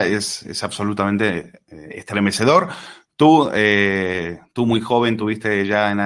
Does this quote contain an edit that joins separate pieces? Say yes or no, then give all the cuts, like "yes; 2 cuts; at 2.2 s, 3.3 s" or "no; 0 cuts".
no; 0 cuts